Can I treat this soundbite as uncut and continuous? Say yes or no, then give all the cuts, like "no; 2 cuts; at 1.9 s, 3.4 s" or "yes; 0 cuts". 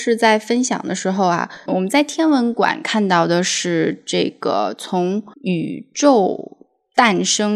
no; 2 cuts; at 1.7 s, 5.3 s